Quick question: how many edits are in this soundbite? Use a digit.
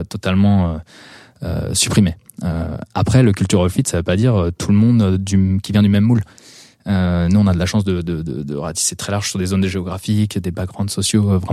0